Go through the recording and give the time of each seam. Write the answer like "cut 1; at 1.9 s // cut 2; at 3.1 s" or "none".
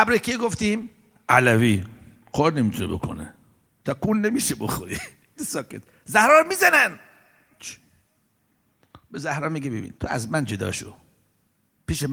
cut 1; at 5.4 s // cut 2; at 10.0 s